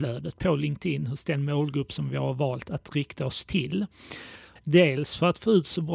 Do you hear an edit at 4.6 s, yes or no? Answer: yes